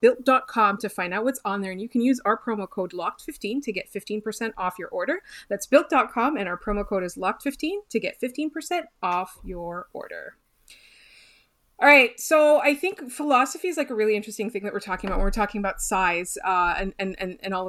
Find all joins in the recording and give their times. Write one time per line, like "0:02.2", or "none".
none